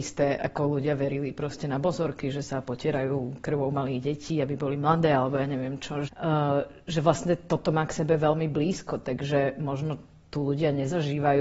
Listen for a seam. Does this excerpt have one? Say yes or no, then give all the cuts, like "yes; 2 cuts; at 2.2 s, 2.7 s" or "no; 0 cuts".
yes; 1 cut; at 6.1 s